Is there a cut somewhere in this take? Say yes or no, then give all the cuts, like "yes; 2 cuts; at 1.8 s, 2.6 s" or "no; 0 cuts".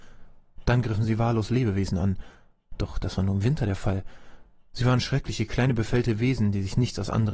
no; 0 cuts